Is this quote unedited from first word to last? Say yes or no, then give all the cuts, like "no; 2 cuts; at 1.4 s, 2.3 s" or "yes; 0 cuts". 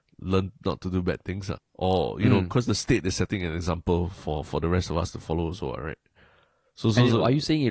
no; 1 cut; at 1.6 s